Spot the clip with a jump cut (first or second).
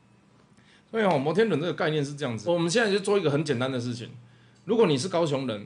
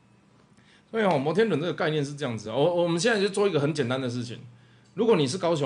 first